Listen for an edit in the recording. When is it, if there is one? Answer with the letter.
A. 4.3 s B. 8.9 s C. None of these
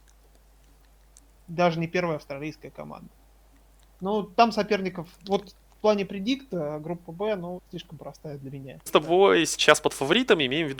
B